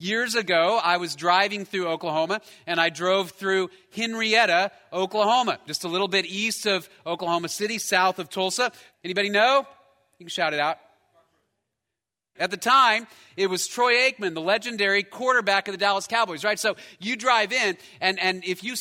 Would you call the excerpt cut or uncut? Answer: cut